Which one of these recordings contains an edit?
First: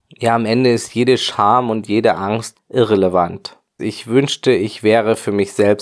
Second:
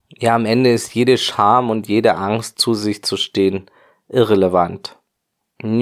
first; 2 cuts; at 2.5 s, 3.8 s

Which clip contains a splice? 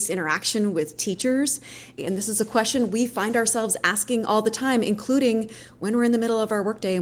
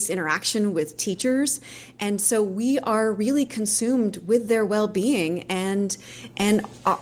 first; 1 cut; at 2.0 s

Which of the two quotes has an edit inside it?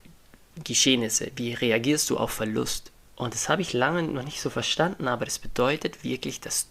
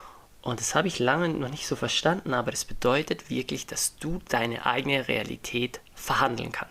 first; 1 cut; at 3.0 s

